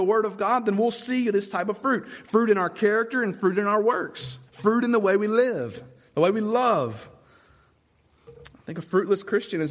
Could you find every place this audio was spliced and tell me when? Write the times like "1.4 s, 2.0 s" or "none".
4.5 s